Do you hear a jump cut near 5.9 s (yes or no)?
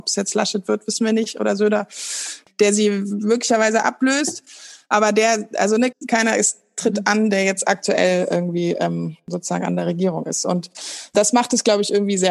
yes